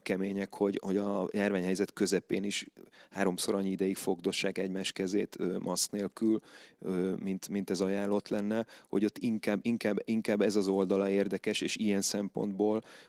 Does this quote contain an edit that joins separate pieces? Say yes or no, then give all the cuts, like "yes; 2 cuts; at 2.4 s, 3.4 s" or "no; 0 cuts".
no; 0 cuts